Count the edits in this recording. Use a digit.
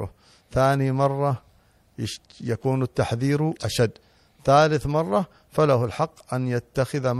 1